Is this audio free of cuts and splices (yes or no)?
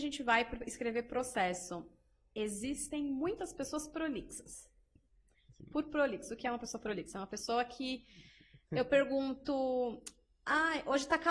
yes